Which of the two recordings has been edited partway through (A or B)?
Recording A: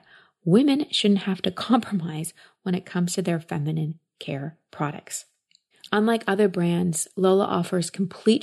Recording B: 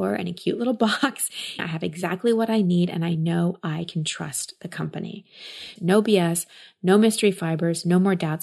B